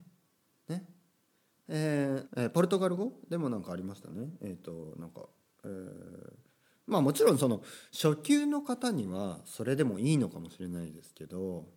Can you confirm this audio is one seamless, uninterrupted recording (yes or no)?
no